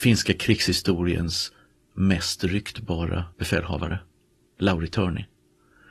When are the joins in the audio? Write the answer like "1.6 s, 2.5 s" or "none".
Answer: 3.3 s